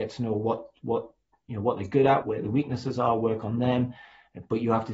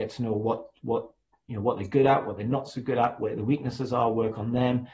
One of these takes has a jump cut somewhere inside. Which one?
first; 1 cut; at 2.2 s

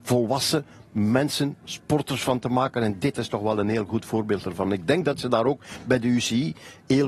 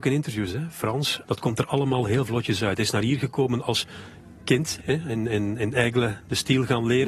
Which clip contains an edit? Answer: second; 2 cuts; at 1.2 s, 4.8 s

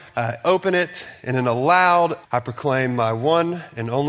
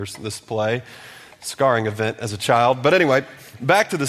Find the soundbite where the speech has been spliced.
first; 1 cut; at 2.2 s

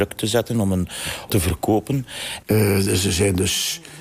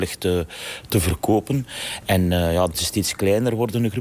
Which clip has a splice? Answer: first; 2 cuts; at 1.3 s, 2.4 s

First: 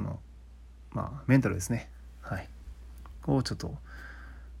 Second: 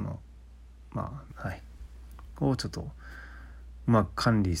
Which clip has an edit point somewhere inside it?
second; 1 cut; at 1.3 s

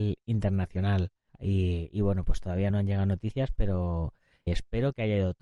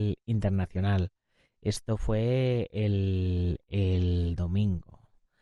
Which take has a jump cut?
first; 3 cuts; at 1.3 s, 2.7 s, 4.5 s

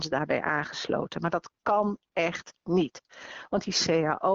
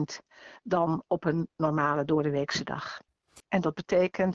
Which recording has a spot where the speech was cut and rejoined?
second; 1 cut; at 3.4 s

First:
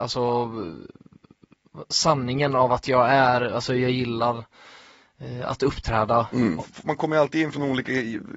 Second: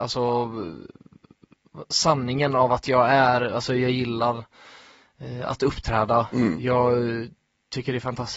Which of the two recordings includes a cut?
first; 1 cut; at 6.6 s

